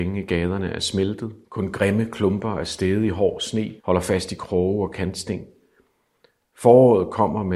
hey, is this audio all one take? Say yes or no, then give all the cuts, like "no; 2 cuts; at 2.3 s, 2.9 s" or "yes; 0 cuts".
no; 2 cuts; at 1.4 s, 3.8 s